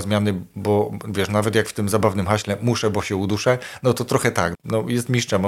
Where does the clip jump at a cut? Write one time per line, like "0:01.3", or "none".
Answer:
0:04.5